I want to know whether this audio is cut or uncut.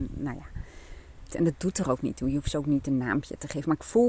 cut